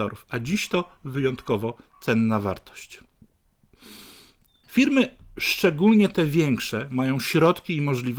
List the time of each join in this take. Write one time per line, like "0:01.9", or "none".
0:04.6